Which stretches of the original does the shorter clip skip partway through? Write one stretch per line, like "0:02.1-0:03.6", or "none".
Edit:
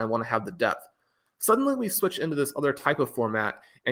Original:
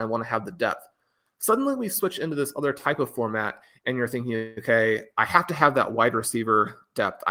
none